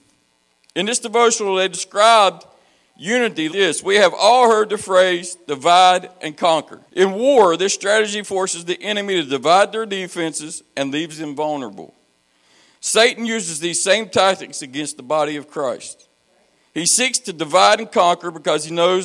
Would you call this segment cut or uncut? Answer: cut